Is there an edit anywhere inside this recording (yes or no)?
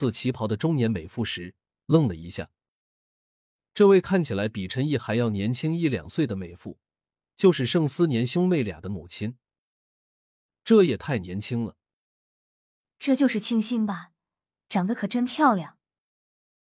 no